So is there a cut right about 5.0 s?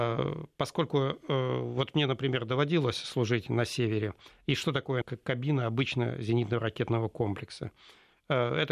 yes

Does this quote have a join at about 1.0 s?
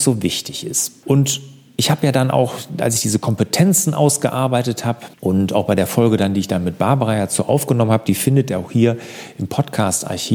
no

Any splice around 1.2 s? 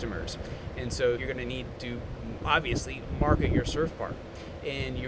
yes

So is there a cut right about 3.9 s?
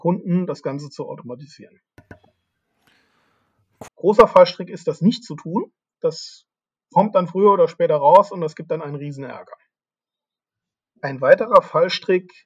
yes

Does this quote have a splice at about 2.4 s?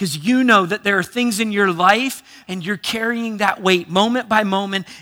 yes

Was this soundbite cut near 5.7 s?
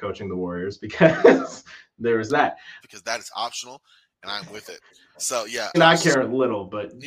yes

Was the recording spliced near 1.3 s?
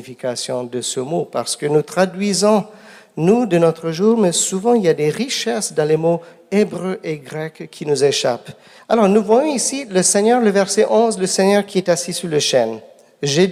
no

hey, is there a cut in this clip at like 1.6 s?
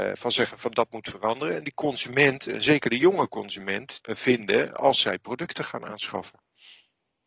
no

